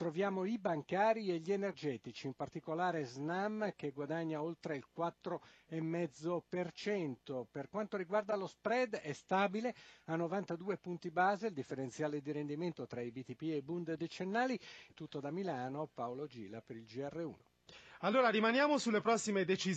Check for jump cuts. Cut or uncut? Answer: cut